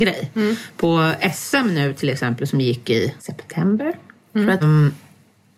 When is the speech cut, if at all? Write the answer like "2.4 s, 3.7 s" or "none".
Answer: 3.2 s, 4.6 s